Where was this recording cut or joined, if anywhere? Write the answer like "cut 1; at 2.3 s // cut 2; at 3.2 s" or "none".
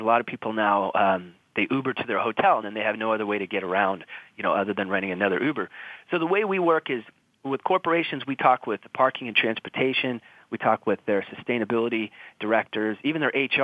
none